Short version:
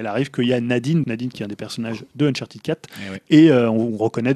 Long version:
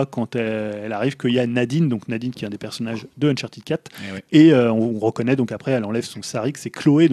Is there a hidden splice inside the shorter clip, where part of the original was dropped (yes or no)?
yes